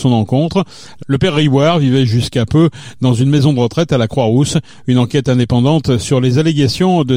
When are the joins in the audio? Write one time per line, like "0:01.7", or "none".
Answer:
0:01.0